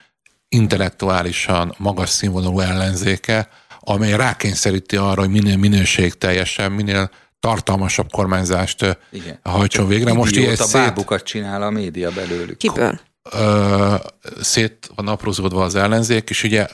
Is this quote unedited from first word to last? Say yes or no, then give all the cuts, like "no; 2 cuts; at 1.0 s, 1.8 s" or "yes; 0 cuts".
no; 1 cut; at 12.6 s